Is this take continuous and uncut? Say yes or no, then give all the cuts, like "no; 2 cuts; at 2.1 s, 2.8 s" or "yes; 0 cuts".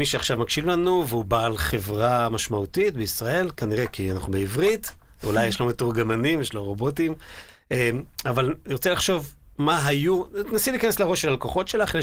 yes; 0 cuts